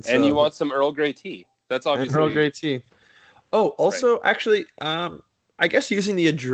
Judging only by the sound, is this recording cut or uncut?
cut